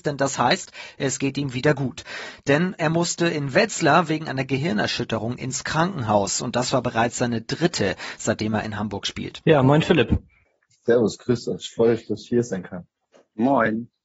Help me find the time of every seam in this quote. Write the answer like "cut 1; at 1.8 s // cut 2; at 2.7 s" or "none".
cut 1; at 9.4 s

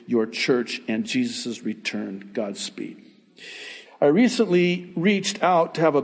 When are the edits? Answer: cut 1; at 3.9 s

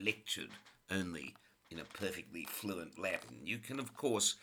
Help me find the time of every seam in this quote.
none

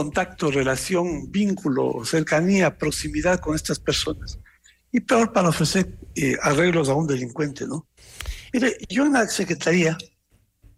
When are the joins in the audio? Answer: none

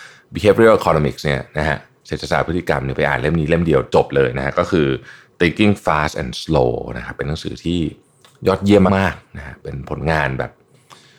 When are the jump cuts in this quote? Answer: cut 1; at 8.9 s

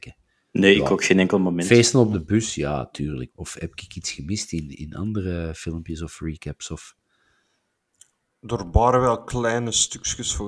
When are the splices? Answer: cut 1; at 3.3 s

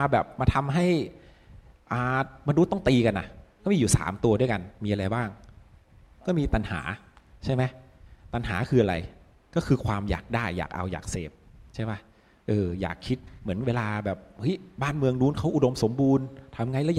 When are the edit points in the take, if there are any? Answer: none

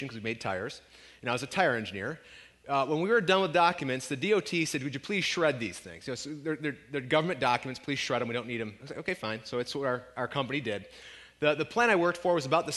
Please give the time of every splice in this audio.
none

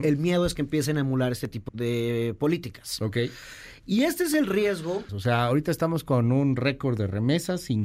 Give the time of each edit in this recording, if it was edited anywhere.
cut 1; at 1.7 s // cut 2; at 5.1 s

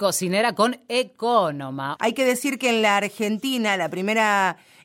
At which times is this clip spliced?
cut 1; at 2.0 s

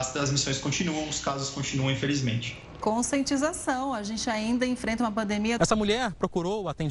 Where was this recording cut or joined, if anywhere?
cut 1; at 5.6 s

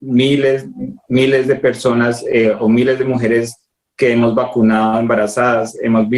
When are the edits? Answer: none

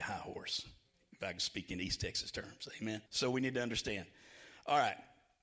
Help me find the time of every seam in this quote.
cut 1; at 3.1 s

